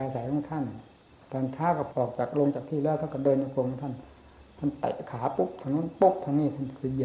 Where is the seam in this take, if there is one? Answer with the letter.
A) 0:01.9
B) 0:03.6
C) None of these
A